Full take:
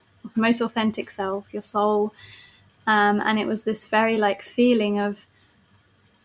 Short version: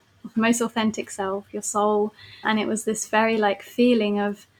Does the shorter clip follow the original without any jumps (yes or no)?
no